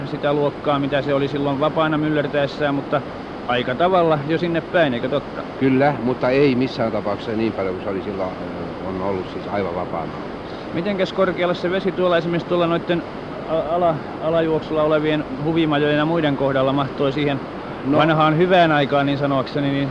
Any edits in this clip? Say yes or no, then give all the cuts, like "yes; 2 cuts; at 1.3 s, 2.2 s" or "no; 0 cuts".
no; 0 cuts